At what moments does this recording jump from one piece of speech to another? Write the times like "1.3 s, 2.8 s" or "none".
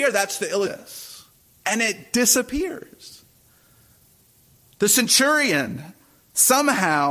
none